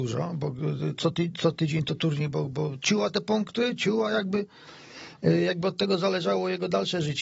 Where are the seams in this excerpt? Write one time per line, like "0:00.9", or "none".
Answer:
none

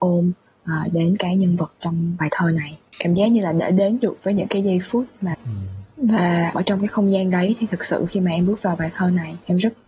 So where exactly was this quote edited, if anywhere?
0:05.3
0:06.5

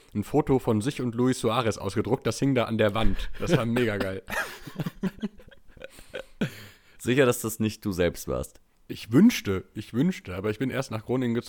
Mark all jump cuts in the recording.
none

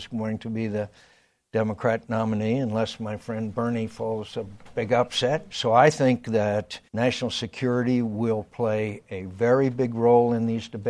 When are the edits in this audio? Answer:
0:05.5
0:06.9

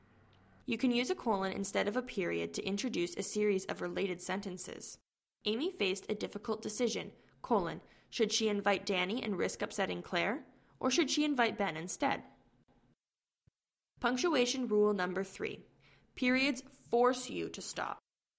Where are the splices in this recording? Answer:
none

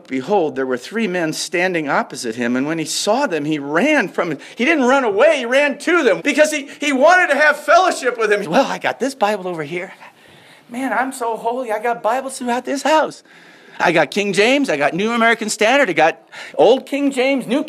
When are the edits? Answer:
0:06.2
0:08.4

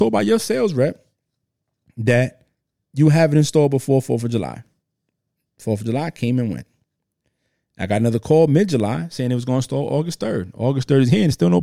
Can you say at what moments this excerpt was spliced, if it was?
none

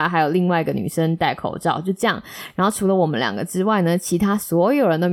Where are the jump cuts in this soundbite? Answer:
none

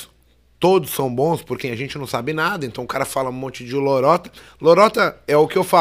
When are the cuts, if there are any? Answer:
0:01.6

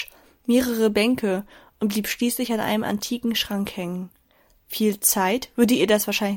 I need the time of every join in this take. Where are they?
none

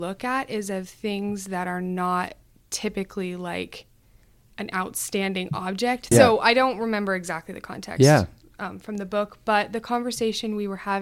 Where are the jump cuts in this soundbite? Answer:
0:06.1

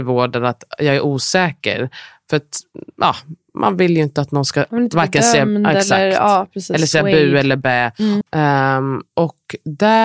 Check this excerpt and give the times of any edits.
0:08.2

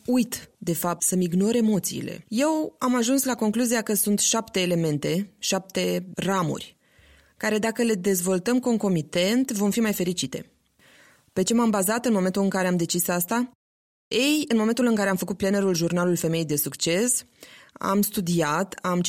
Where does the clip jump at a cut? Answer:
0:01.0
0:02.2

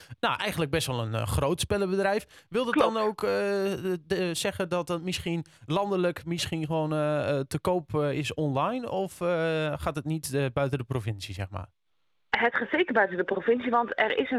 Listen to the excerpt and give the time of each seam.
none

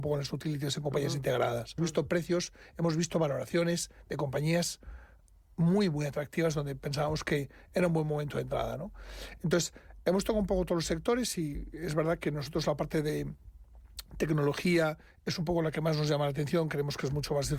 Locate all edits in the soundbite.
0:01.8

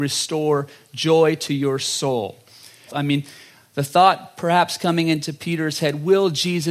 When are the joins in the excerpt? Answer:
0:02.9

